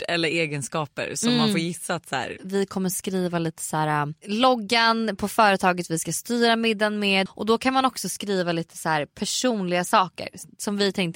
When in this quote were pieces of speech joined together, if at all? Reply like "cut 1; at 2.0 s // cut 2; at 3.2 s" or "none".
cut 1; at 2.4 s // cut 2; at 7.3 s